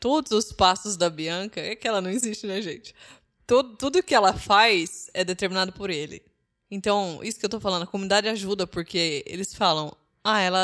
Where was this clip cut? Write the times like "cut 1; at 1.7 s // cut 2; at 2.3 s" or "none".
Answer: none